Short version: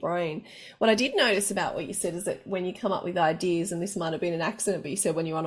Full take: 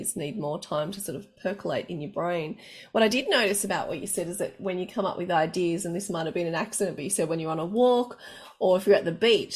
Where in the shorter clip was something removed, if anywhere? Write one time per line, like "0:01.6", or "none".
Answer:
none